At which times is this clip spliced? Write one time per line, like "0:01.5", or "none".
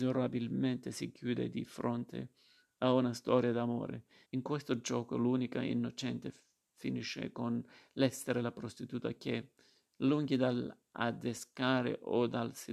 0:04.3